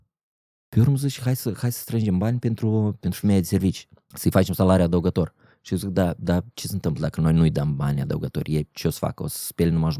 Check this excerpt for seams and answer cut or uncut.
cut